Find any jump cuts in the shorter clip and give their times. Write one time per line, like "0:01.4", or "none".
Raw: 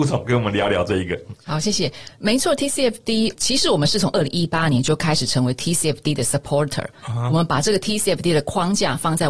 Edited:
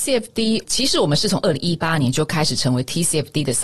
none